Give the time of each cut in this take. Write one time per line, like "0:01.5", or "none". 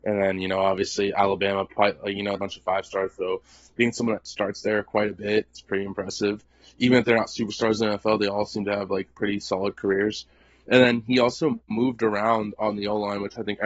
0:02.3

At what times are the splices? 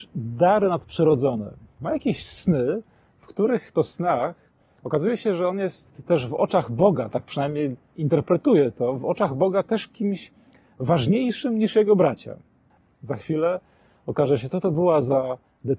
0:12.9

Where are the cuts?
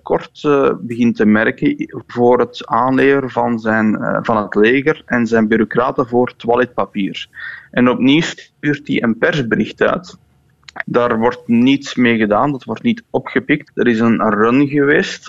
0:10.8
0:13.7

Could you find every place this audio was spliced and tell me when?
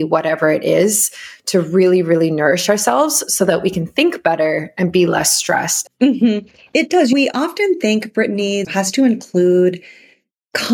0:05.9
0:08.6

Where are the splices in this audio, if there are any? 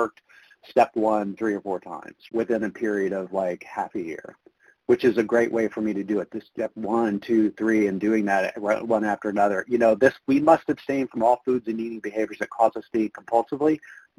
0:02.3

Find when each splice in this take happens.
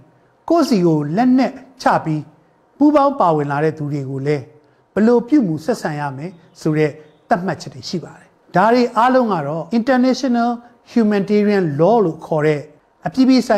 0:09.7

